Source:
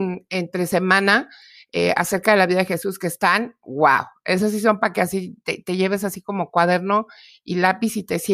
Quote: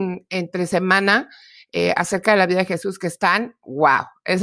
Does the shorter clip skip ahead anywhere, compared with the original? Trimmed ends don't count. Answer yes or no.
no